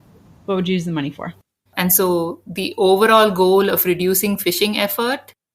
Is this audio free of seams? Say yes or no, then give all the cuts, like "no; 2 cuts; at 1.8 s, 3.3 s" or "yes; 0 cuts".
no; 1 cut; at 1.7 s